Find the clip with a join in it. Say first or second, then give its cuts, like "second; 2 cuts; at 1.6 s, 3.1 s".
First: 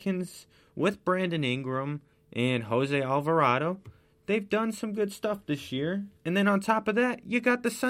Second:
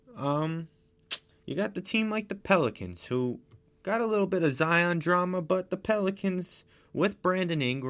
first; 1 cut; at 6.2 s